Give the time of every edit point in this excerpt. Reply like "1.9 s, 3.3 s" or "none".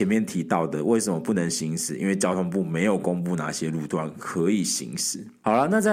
none